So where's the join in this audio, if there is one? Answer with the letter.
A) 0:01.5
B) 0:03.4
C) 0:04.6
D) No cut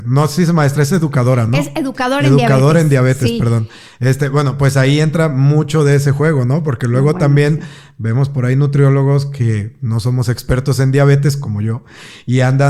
D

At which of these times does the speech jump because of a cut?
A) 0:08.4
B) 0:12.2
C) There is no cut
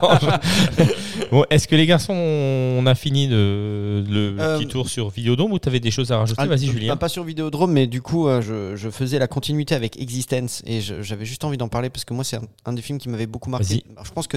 A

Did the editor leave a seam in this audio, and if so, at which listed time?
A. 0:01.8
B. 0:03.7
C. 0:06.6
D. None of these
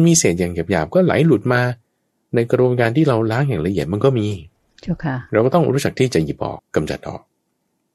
C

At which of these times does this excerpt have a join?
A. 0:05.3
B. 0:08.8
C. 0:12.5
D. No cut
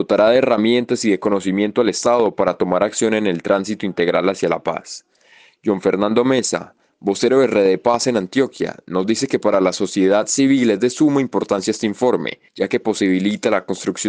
C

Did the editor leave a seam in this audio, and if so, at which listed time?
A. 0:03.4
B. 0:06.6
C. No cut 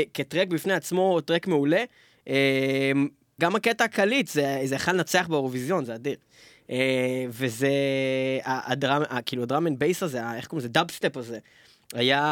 A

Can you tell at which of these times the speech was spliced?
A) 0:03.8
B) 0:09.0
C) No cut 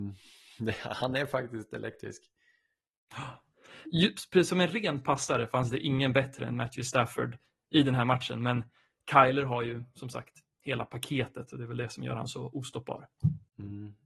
A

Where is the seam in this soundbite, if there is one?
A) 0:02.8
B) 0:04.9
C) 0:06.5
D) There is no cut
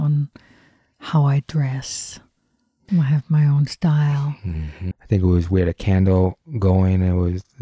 B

